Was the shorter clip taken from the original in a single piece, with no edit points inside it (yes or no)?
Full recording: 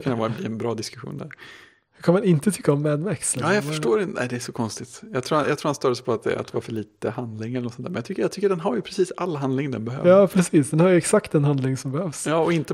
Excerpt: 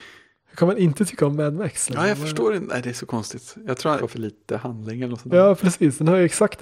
no